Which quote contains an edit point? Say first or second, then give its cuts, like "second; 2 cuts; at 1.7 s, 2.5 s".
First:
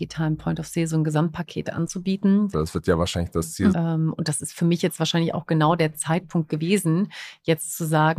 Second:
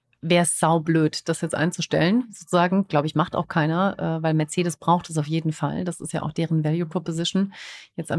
first; 2 cuts; at 2.5 s, 3.7 s